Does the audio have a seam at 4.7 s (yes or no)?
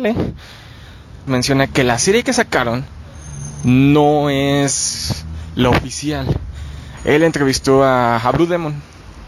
no